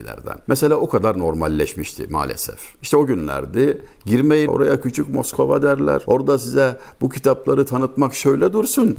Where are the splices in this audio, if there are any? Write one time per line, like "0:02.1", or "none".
0:04.5